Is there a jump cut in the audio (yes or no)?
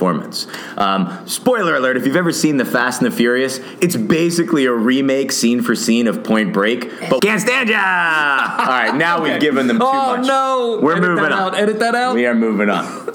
yes